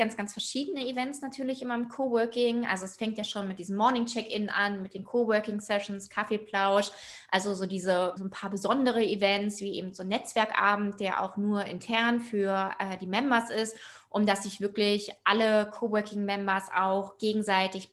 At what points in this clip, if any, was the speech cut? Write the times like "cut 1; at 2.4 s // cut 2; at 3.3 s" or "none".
cut 1; at 8.2 s